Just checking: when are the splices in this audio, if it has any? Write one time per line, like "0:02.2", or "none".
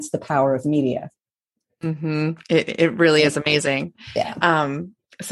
none

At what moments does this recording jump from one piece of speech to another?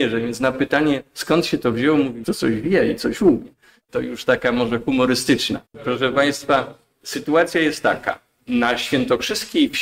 0:02.2
0:03.9
0:05.7

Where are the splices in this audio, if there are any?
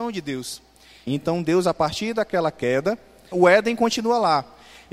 0:01.1
0:03.3

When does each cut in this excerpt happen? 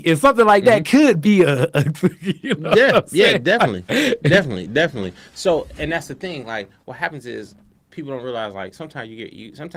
none

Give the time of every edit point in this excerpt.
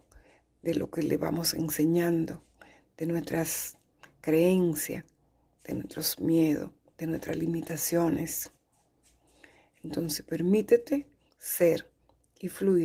none

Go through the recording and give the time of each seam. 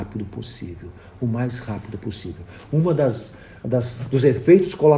none

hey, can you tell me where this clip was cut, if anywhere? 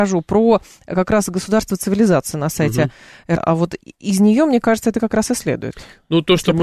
0:03.4

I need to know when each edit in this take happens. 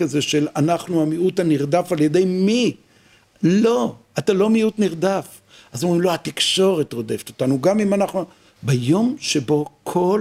0:08.6

